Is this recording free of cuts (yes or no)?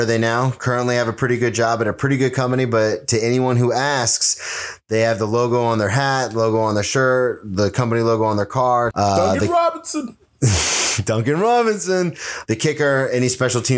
no